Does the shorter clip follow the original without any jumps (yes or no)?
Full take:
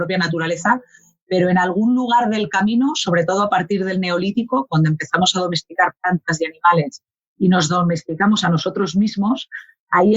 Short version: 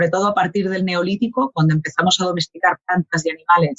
yes